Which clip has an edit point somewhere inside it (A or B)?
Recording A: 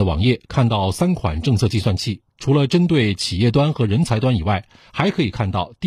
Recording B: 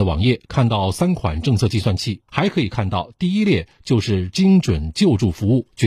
B